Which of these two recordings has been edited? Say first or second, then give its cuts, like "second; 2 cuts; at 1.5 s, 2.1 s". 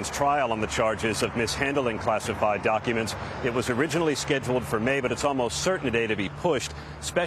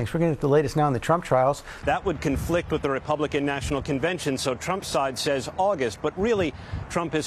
second; 1 cut; at 1.8 s